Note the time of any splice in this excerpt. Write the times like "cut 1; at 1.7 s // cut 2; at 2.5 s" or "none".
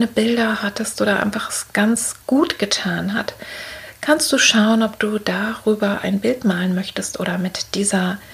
cut 1; at 2.2 s